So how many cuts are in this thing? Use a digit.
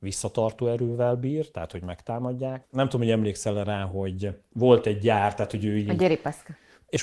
1